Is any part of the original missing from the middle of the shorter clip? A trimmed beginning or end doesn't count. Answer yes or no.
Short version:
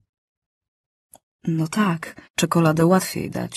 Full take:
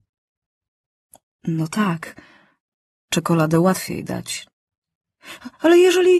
yes